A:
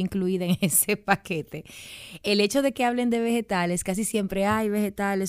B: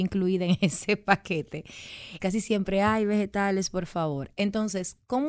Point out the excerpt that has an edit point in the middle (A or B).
B